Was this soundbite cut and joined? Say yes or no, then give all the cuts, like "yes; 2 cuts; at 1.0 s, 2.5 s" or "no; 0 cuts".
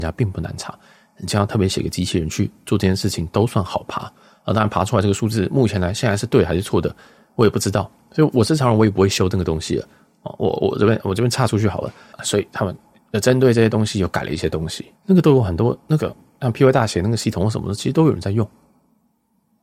yes; 2 cuts; at 12.1 s, 15.0 s